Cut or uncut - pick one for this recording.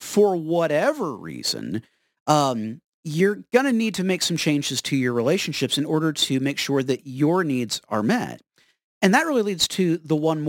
uncut